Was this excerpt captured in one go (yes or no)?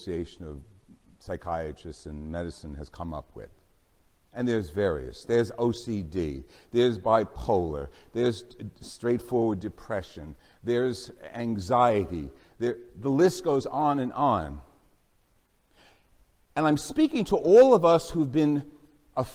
yes